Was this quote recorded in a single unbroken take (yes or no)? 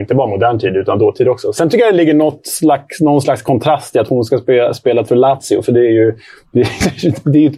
yes